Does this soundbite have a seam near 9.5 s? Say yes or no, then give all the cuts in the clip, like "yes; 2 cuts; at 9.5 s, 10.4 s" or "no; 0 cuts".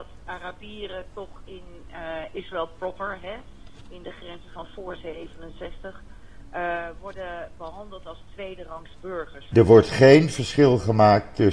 yes; 1 cut; at 9.5 s